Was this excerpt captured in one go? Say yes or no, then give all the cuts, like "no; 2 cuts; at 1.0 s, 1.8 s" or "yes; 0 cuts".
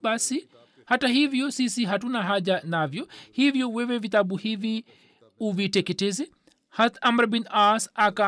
yes; 0 cuts